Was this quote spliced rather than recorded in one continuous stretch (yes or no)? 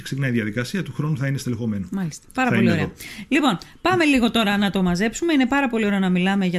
no